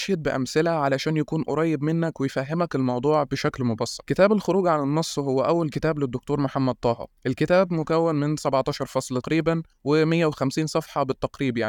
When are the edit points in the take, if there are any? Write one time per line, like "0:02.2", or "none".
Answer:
0:09.2